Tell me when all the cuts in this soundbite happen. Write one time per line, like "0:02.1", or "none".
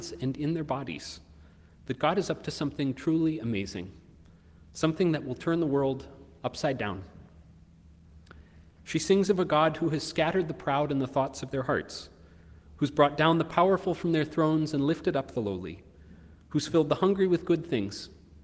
0:08.7